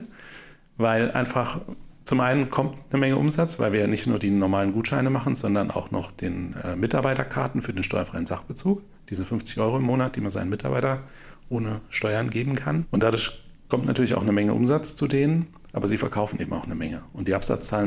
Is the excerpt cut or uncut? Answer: uncut